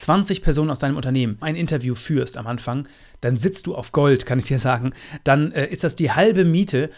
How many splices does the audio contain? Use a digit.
1